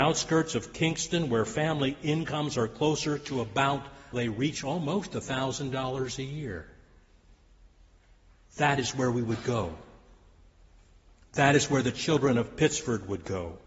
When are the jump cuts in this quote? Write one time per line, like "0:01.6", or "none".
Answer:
0:04.1